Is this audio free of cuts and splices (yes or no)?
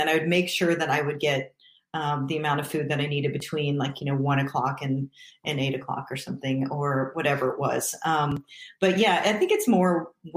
yes